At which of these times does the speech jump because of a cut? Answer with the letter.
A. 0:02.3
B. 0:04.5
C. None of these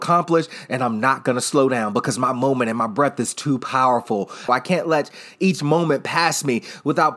B